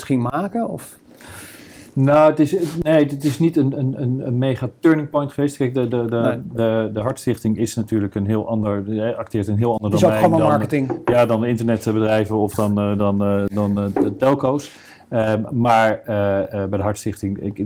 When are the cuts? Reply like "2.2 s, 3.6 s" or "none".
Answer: none